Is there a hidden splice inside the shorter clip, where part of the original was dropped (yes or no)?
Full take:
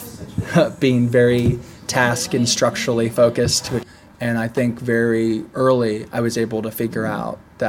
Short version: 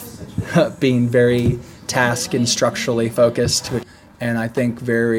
no